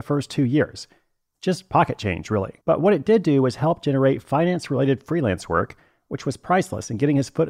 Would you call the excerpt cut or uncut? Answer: cut